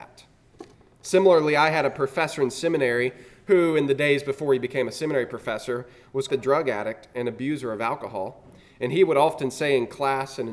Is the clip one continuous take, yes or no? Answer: no